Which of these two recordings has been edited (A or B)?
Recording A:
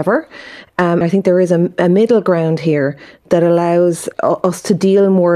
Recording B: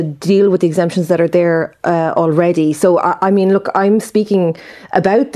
A